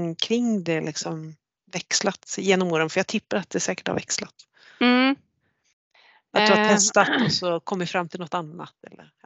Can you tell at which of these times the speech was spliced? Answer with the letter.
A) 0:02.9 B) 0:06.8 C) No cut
C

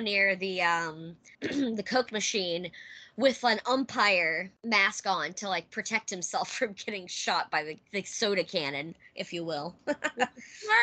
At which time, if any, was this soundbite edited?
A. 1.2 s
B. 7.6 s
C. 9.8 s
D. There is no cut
D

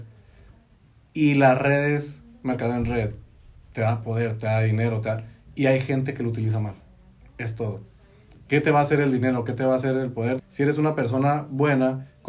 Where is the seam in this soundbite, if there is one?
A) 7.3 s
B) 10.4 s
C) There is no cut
B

